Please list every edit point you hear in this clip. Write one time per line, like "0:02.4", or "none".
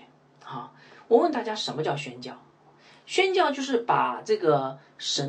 none